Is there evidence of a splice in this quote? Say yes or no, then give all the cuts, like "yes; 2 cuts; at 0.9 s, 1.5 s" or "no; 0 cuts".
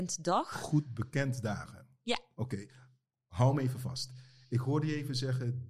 no; 0 cuts